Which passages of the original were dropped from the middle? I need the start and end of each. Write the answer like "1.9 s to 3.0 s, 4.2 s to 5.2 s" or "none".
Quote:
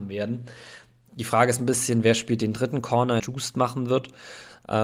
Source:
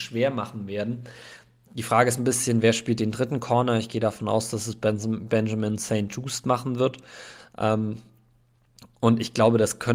3.8 s to 6.1 s